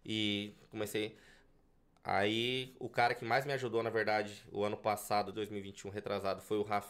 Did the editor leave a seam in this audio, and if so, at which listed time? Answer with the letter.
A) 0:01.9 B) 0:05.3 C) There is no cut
B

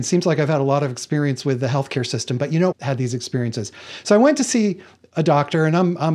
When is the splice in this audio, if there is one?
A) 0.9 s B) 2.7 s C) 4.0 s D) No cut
B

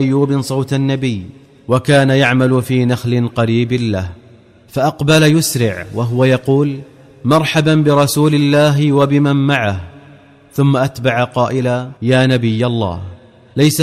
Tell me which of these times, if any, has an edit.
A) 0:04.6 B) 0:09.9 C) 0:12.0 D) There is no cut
C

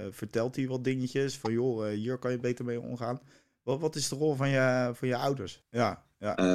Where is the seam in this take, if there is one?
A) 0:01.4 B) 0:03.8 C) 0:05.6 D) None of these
C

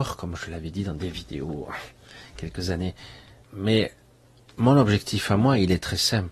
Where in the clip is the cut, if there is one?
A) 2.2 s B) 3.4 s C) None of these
B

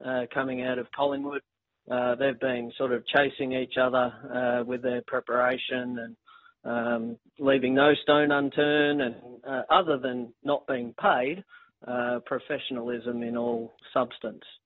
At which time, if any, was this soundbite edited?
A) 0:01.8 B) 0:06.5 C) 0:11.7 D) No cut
D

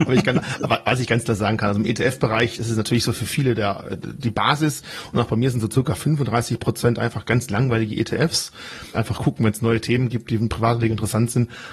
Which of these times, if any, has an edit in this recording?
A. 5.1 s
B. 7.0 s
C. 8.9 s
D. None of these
C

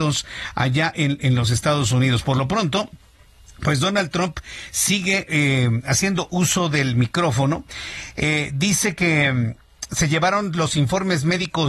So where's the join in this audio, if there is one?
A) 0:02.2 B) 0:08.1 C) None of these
C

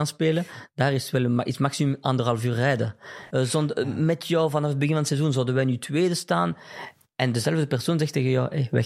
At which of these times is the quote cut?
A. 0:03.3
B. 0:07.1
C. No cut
A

